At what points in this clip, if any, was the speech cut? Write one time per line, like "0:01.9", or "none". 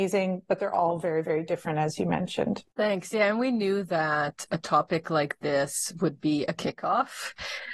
none